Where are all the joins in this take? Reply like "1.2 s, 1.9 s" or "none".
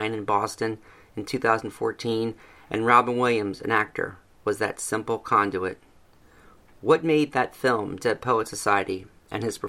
none

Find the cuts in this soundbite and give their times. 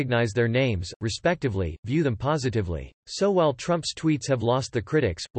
1.0 s, 3.0 s

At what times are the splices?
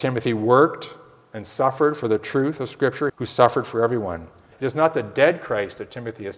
3.1 s, 4.5 s

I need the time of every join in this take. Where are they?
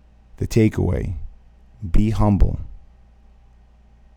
none

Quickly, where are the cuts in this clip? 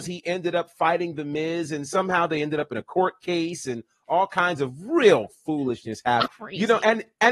6.3 s

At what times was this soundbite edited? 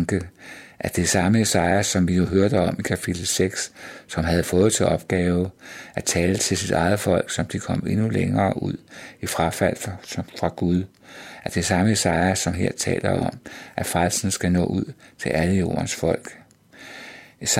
none

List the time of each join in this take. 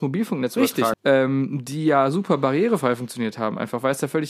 0.9 s

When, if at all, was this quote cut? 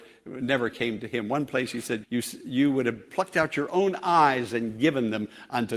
2.0 s

